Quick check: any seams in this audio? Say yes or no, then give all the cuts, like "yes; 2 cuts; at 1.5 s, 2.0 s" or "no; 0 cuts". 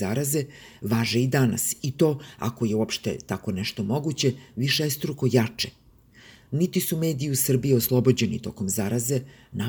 no; 0 cuts